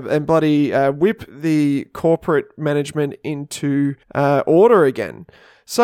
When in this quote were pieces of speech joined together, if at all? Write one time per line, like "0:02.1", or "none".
0:04.0